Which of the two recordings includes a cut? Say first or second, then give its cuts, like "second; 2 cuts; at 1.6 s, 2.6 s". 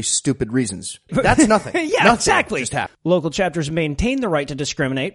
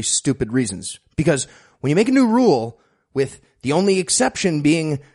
first; 2 cuts; at 1.1 s, 2.9 s